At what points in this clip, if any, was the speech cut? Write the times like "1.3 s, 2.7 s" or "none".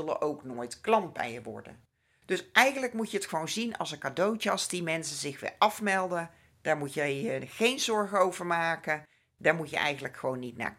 none